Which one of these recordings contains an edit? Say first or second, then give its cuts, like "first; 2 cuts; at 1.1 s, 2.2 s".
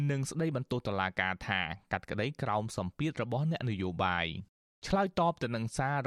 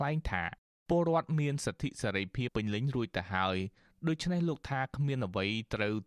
second; 1 cut; at 2.5 s